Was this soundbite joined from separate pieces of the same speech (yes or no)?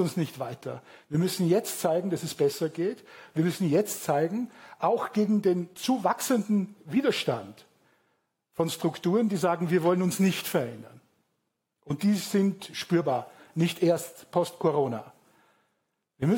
no